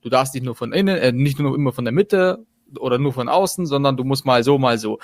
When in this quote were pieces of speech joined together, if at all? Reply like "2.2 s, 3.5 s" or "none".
none